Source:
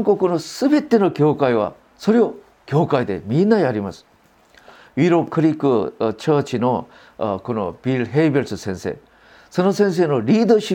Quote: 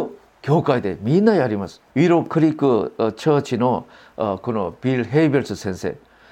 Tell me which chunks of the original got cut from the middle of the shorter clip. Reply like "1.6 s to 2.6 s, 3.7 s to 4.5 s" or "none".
4.1 s to 4.9 s